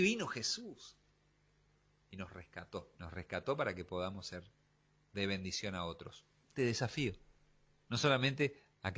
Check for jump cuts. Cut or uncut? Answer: cut